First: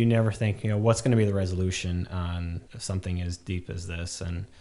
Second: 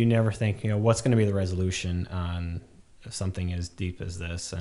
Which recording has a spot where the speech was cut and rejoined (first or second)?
first